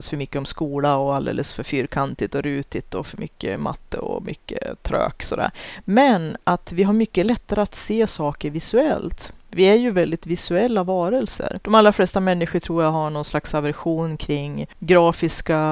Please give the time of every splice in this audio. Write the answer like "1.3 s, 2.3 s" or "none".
11.6 s